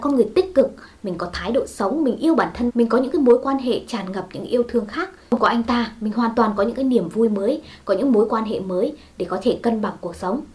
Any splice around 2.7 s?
yes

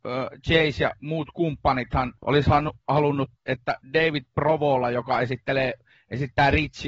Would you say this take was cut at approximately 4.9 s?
no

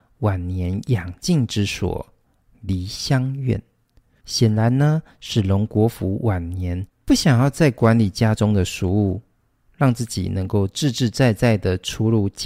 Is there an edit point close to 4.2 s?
yes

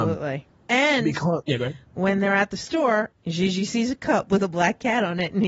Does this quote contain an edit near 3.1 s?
yes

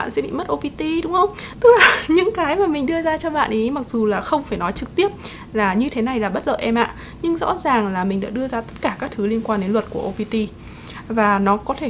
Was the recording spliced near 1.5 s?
yes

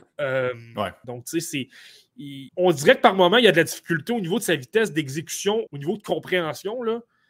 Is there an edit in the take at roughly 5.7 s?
yes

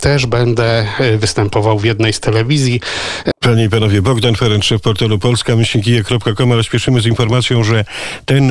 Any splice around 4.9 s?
no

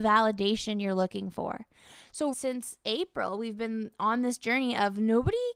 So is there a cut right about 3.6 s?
no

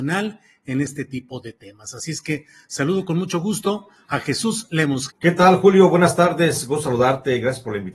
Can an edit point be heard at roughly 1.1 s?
no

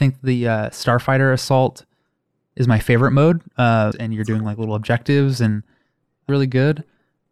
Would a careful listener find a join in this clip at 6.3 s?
yes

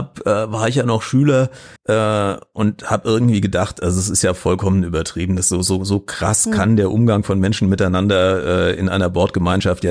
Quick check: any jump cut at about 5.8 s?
no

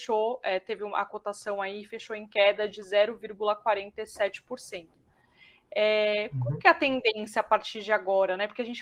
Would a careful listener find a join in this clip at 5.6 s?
no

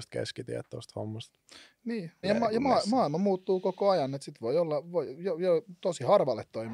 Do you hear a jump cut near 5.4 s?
no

